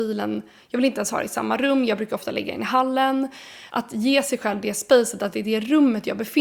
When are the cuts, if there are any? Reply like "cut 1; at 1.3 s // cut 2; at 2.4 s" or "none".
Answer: cut 1; at 3.7 s

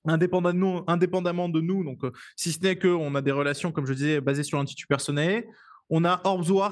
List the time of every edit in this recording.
none

